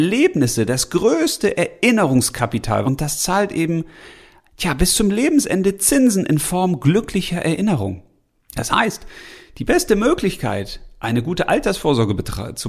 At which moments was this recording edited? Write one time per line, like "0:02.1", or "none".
0:02.8
0:08.4

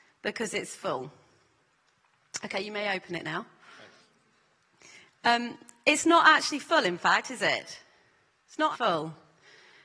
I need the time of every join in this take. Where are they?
0:08.7

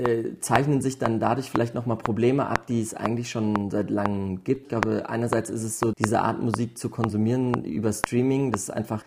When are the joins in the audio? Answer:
0:04.6
0:05.9

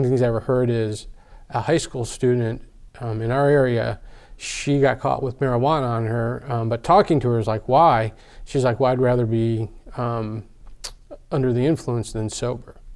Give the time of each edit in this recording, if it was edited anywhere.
none

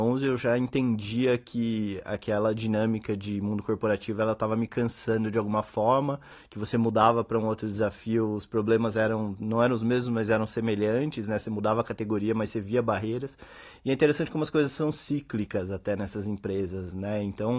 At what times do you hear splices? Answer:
none

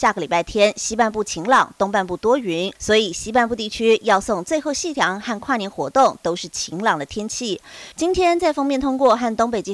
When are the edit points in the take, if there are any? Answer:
0:02.8
0:07.9

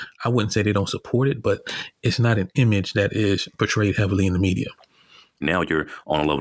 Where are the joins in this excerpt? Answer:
0:05.4

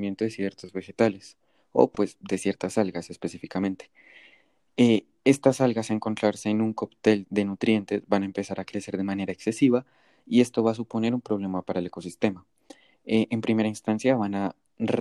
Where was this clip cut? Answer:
0:07.2

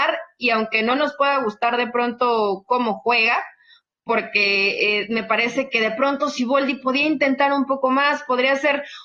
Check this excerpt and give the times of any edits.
0:05.0

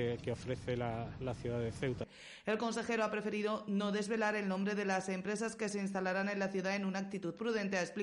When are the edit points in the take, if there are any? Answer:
none

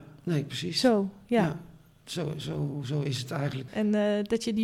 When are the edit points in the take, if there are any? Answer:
0:03.7

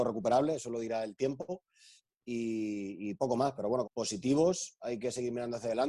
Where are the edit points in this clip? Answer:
0:03.8

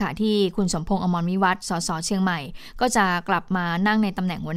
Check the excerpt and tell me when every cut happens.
none

